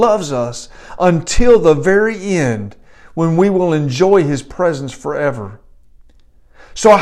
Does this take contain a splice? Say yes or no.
no